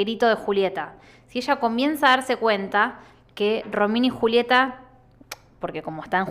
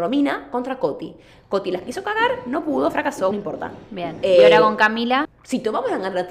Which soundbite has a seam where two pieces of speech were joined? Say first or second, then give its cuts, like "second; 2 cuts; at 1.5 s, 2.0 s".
second; 2 cuts; at 3.3 s, 5.3 s